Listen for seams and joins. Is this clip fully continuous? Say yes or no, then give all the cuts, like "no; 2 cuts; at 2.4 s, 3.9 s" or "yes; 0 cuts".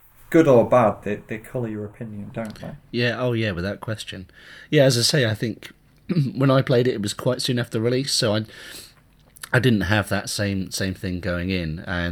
yes; 0 cuts